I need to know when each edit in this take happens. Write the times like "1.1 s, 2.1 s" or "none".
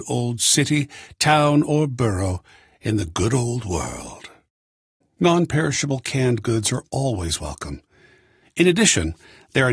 5.0 s